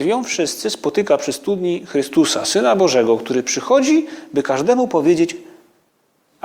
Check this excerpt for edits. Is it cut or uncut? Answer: uncut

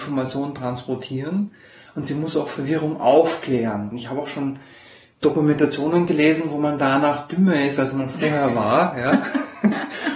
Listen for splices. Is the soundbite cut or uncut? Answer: uncut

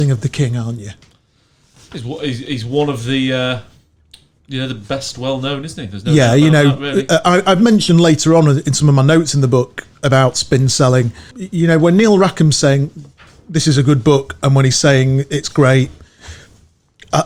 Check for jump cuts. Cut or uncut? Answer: cut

